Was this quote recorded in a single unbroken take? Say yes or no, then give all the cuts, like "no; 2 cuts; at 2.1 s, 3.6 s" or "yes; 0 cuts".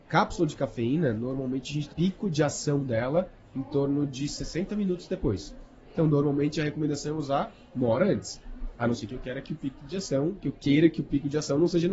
no; 2 cuts; at 1.9 s, 8.7 s